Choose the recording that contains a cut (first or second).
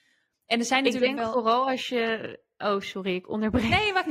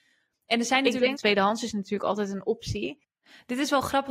second